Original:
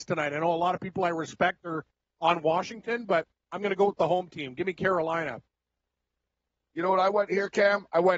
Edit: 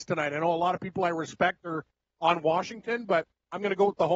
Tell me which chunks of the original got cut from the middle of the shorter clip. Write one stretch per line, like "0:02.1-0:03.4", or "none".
none